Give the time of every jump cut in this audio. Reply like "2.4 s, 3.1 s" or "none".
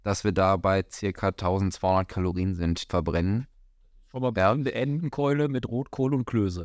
2.9 s